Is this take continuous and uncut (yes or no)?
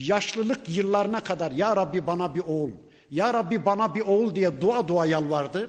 yes